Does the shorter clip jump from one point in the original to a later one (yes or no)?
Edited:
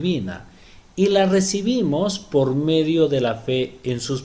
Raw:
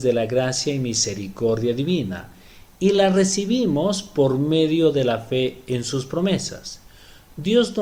no